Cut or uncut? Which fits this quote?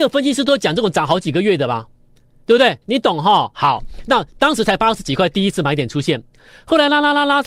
cut